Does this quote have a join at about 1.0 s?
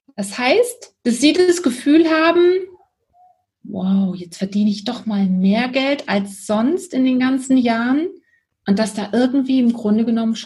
yes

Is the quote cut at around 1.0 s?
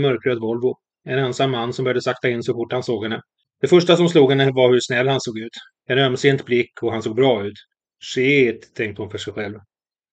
no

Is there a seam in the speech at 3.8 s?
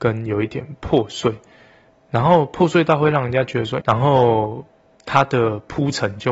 yes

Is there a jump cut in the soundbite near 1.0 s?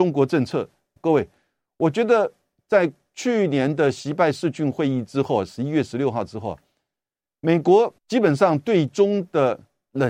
yes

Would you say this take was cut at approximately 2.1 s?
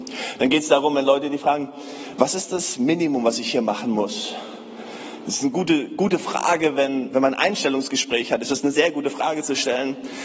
no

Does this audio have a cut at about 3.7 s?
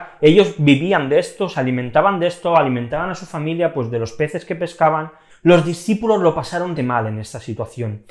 no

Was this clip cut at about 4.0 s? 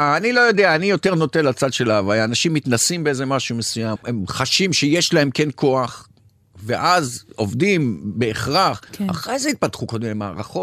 yes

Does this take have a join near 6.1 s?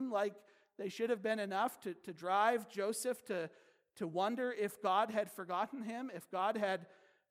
no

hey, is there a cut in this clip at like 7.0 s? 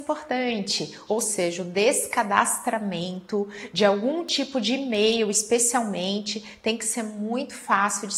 no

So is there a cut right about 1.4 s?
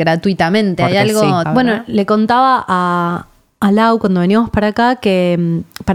yes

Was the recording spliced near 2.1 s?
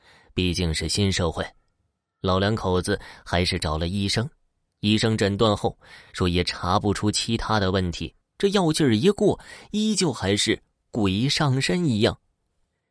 no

